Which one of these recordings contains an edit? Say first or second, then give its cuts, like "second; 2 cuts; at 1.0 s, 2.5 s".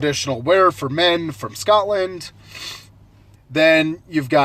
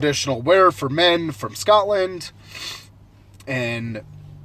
first; 1 cut; at 3.4 s